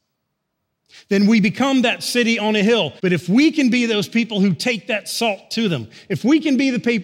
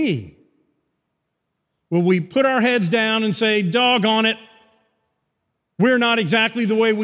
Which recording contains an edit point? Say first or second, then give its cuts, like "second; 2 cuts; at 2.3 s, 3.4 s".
first; 1 cut; at 3.0 s